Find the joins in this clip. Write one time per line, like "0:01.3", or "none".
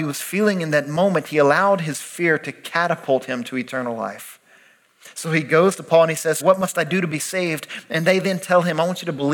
0:06.4